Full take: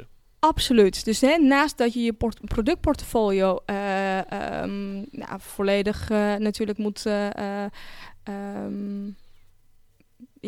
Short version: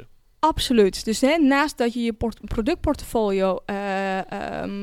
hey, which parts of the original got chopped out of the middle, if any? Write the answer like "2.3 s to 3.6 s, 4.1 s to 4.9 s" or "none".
none